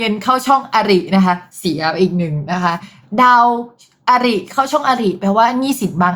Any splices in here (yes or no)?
no